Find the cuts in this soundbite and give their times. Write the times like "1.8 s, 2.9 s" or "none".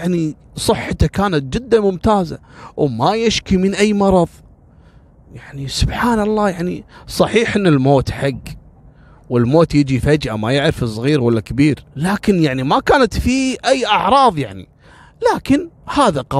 11.9 s